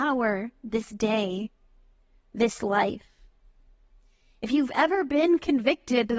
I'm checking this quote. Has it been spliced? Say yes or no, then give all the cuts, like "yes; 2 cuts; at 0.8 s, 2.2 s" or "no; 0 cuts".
no; 0 cuts